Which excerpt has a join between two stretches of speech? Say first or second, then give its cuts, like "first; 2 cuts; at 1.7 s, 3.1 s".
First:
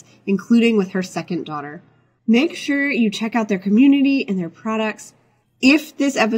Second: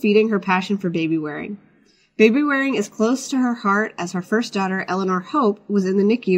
first; 1 cut; at 5.4 s